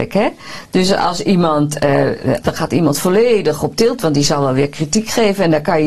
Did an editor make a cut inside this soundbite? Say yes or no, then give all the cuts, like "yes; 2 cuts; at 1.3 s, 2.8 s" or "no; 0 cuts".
yes; 1 cut; at 2.4 s